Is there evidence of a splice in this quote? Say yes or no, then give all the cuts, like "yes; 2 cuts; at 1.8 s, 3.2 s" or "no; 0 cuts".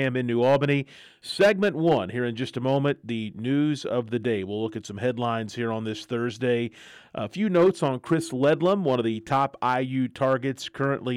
no; 0 cuts